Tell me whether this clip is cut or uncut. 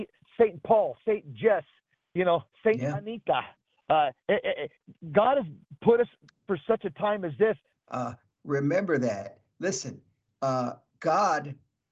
cut